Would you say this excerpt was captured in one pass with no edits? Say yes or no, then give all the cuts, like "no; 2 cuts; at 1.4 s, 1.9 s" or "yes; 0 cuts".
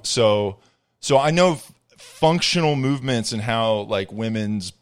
yes; 0 cuts